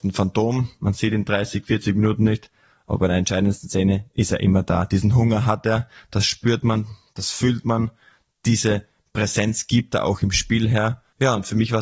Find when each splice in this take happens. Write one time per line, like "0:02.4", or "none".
none